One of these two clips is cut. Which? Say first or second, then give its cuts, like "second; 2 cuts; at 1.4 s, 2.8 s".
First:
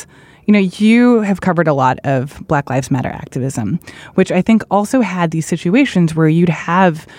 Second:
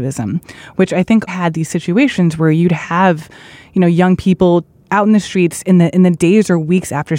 second; 1 cut; at 1.3 s